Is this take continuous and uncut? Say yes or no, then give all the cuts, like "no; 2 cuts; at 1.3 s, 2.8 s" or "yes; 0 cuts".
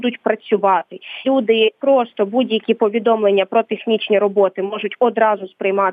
no; 1 cut; at 1.2 s